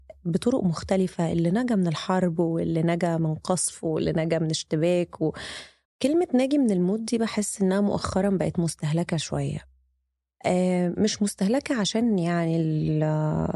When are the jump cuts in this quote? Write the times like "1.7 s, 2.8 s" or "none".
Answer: 5.9 s